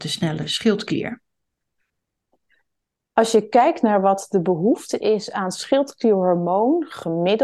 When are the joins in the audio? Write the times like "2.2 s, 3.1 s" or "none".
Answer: none